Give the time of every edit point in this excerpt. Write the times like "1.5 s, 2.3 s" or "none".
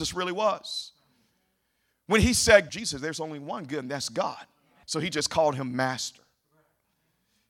2.7 s, 4.8 s